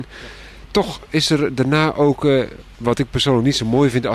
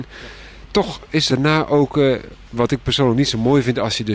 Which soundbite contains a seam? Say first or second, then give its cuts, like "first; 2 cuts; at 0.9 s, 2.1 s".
second; 1 cut; at 1.3 s